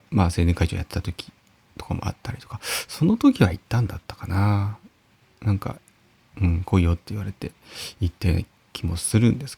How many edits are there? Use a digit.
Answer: 0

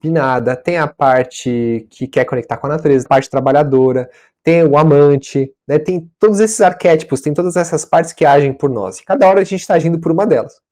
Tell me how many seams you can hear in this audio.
1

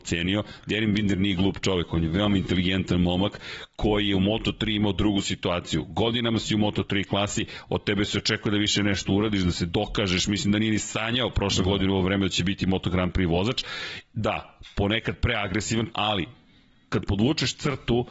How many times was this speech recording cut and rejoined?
1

